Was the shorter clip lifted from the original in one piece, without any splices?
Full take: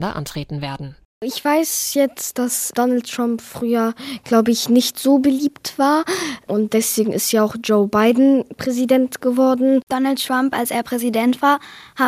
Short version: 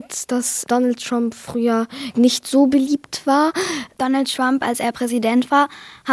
no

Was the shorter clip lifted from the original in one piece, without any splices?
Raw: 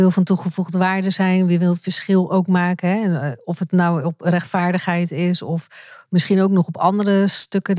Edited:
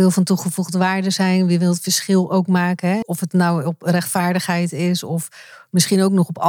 no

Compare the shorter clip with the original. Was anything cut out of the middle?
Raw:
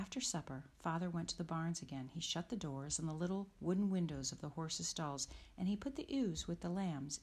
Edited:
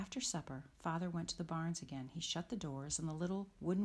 no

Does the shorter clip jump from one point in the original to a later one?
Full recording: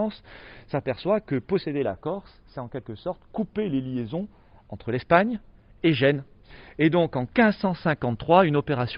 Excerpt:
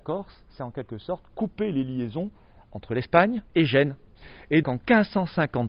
yes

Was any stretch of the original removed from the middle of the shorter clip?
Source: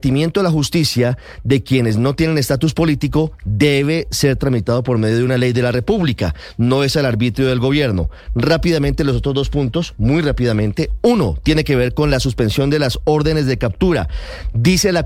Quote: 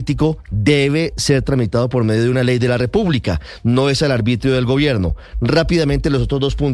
no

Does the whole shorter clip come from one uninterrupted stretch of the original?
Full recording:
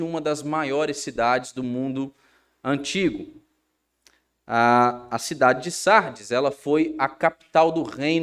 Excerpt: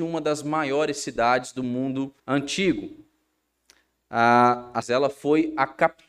no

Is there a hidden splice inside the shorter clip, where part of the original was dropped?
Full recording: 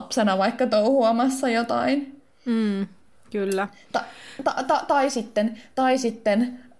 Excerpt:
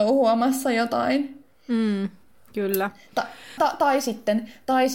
yes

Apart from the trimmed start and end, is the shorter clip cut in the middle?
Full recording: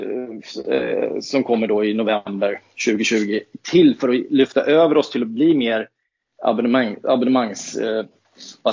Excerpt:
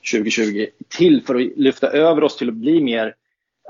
no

